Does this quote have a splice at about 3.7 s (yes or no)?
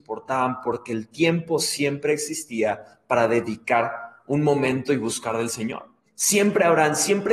no